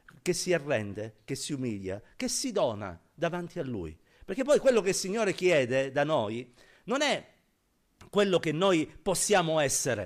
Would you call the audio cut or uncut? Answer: uncut